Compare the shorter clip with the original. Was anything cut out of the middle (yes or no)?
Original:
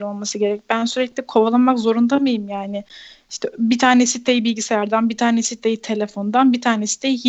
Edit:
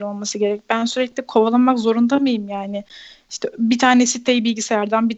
no